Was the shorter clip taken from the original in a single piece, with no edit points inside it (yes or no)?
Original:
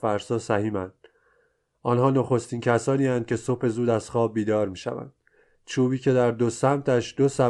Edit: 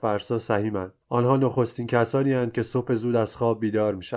no